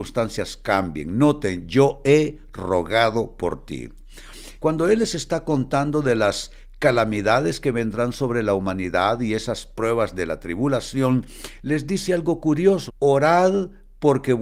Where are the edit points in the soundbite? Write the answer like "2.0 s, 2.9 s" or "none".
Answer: 4.6 s, 12.9 s

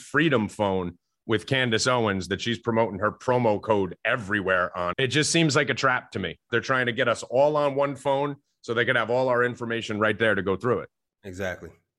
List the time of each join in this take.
4.9 s, 6.5 s

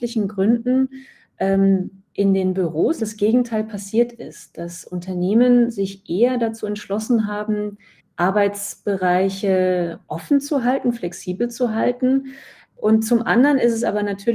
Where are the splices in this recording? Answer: 3.0 s, 8.0 s, 12.7 s

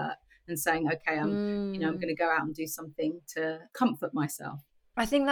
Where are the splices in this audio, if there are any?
none

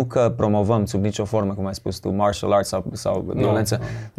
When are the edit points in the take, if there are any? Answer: none

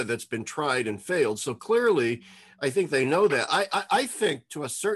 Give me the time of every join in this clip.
none

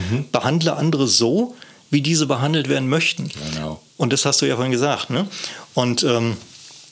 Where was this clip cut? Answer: none

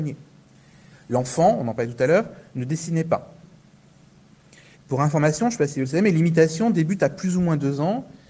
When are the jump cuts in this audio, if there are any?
0.9 s, 4.7 s

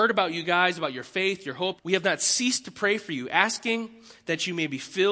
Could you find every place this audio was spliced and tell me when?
1.8 s

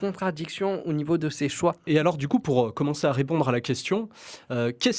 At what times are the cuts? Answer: 1.9 s

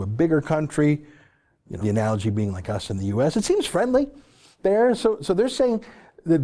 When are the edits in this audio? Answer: 1.8 s

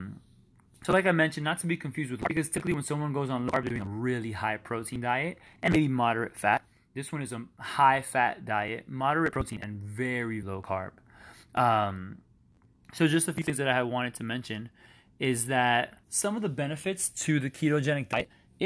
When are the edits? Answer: 10.4 s, 16.0 s

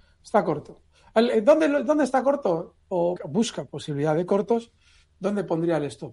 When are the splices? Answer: 3.2 s

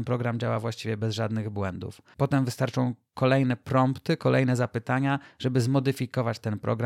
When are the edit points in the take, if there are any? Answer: none

